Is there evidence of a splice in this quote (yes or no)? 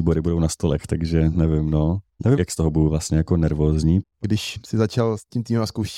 yes